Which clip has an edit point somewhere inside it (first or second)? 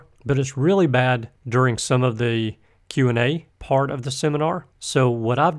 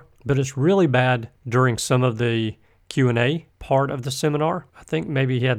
second